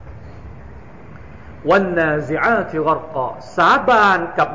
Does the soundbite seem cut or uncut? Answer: uncut